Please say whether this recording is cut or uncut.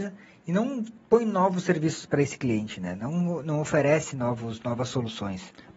uncut